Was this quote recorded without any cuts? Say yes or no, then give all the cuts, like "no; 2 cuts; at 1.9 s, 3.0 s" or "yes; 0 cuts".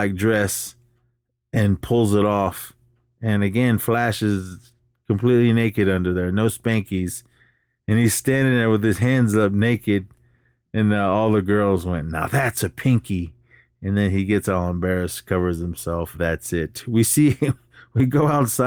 no; 1 cut; at 16.1 s